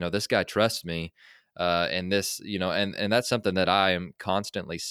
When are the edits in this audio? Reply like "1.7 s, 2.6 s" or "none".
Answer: none